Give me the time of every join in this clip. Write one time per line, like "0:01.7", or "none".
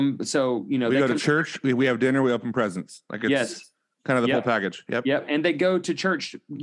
none